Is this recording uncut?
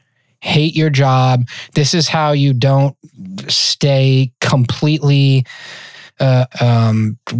no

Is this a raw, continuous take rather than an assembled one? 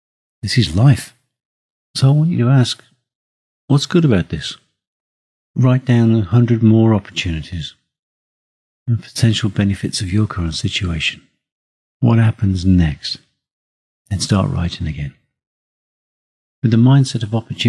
no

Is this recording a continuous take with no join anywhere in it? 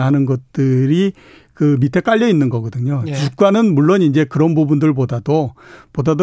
yes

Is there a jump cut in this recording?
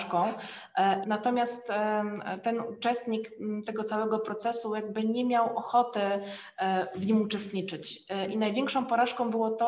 yes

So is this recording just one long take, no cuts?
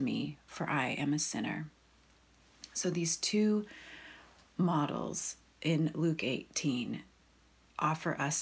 yes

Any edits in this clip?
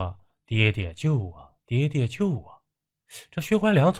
no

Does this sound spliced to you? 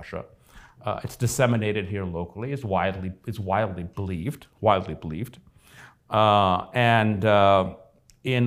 no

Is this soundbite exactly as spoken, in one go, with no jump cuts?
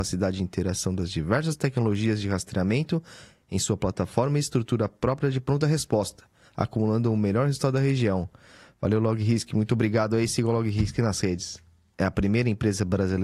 no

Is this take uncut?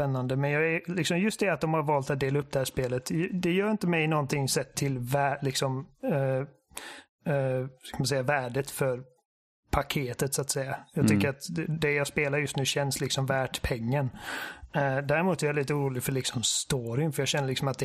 yes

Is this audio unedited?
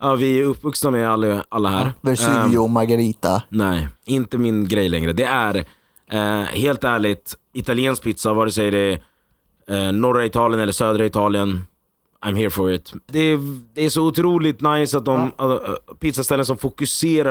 no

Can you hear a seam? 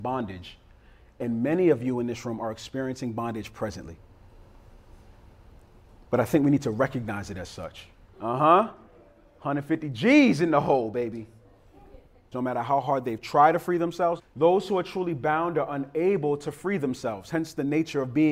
yes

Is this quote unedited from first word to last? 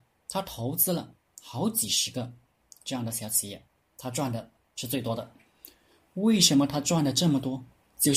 yes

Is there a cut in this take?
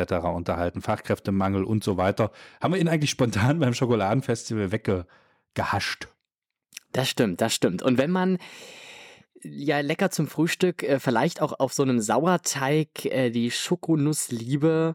no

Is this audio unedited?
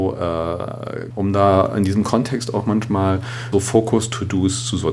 no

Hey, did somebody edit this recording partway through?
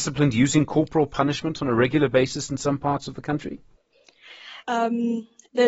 yes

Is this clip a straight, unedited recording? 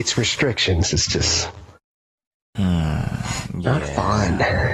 yes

